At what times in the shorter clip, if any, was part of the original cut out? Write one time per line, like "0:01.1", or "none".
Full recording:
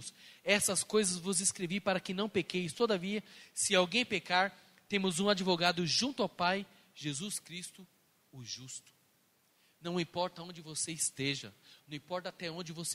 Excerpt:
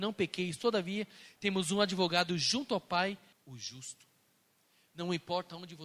0:01.4
0:03.3